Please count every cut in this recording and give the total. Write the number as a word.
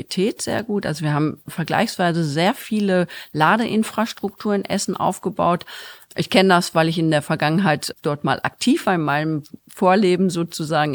one